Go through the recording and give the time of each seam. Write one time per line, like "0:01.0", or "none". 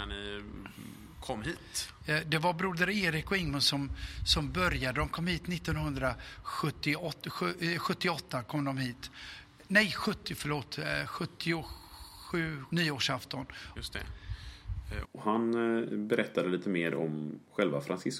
0:12.7
0:13.8
0:15.0